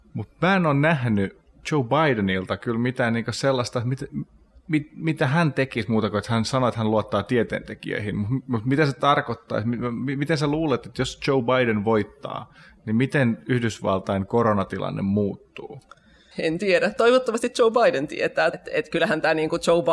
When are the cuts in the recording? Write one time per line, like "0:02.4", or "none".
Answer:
0:16.3
0:18.5